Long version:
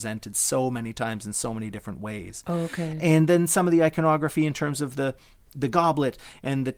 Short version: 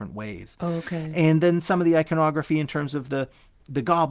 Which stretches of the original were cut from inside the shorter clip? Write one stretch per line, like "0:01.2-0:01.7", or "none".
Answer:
none